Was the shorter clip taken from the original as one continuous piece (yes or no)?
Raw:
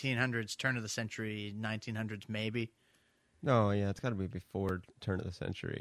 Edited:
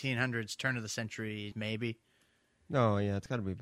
no